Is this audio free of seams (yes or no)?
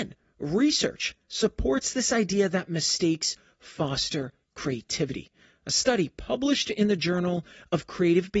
yes